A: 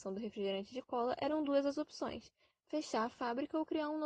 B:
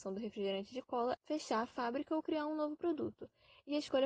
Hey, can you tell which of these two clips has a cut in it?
B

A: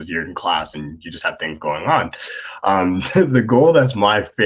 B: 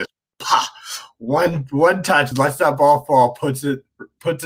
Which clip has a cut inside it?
B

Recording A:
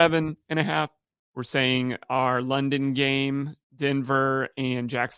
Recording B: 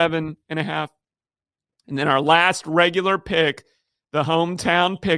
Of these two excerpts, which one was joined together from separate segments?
A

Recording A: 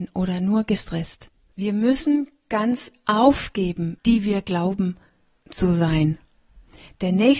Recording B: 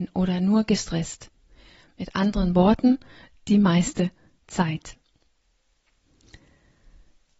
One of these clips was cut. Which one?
A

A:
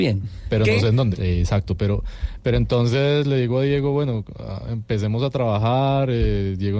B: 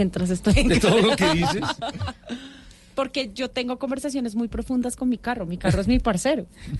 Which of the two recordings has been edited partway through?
A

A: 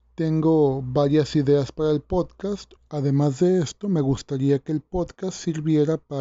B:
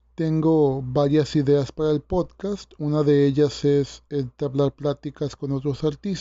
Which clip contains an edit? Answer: A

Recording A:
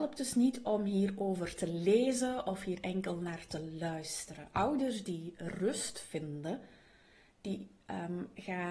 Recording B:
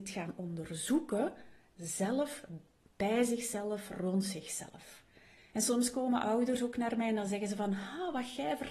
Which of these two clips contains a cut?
B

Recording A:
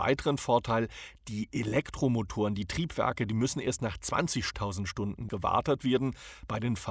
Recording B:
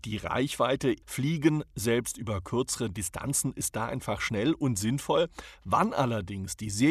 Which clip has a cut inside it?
B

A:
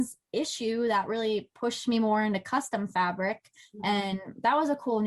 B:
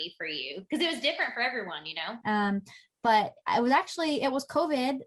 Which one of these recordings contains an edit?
B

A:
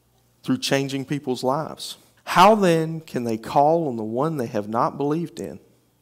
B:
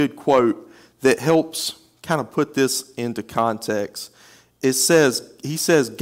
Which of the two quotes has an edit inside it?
A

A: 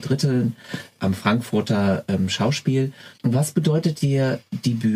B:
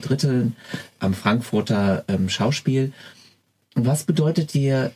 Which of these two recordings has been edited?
A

